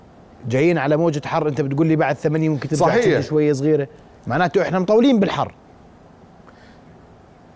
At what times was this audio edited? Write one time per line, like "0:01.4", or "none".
none